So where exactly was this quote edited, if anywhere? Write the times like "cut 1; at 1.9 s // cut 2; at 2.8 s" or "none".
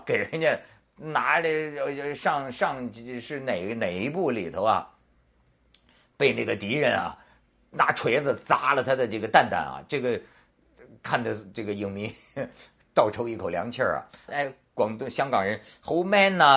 cut 1; at 14.3 s